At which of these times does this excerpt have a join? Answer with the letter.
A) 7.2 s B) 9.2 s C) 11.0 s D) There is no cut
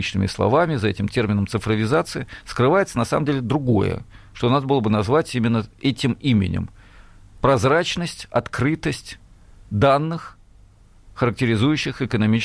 D